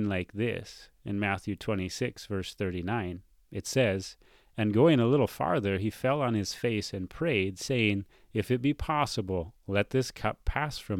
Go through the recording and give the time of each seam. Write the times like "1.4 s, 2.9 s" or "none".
8.1 s